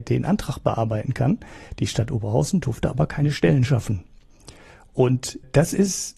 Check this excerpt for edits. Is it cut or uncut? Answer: uncut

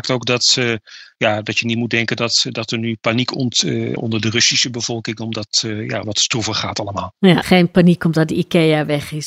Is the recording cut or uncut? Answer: cut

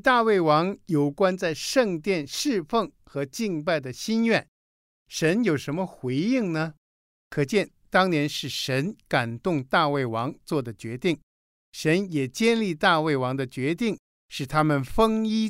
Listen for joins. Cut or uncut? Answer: cut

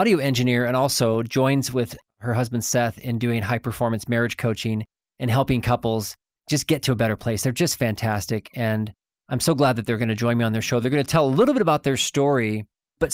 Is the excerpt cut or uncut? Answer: uncut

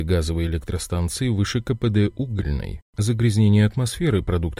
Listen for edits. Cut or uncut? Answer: cut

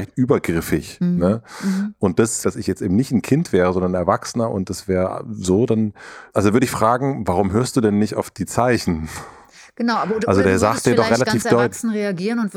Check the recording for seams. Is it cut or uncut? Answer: cut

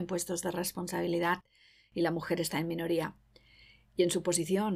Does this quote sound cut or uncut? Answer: uncut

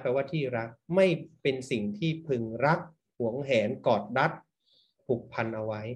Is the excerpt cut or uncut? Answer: uncut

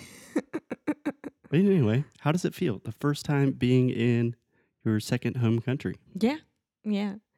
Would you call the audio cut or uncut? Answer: cut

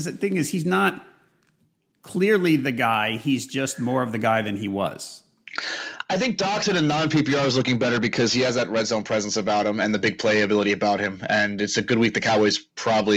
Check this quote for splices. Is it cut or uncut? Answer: uncut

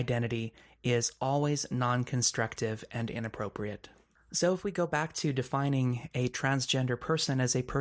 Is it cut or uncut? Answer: uncut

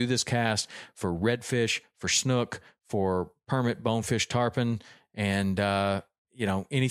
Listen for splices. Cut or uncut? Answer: uncut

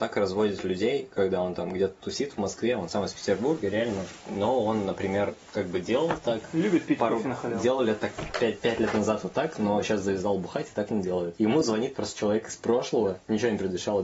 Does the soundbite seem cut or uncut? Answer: uncut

